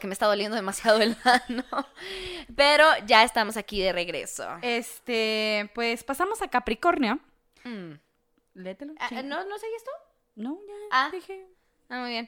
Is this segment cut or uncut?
uncut